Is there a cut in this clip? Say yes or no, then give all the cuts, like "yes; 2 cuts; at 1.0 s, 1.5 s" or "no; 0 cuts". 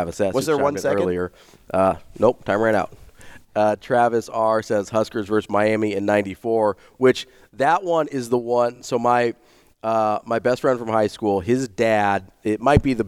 no; 0 cuts